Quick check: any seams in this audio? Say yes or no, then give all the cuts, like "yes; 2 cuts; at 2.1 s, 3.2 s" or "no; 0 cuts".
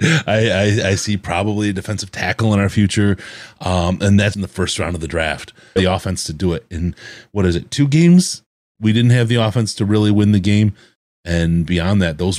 yes; 2 cuts; at 4.3 s, 5.8 s